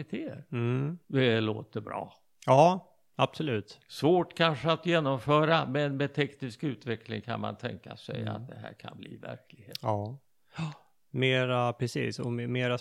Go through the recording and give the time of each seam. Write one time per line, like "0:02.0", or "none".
0:01.0